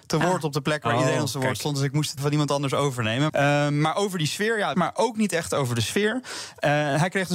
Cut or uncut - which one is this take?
cut